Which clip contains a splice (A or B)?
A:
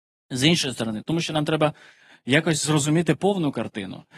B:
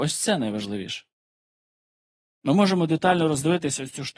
A